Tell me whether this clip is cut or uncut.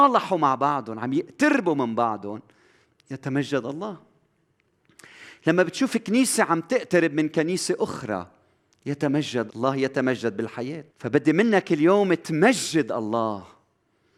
cut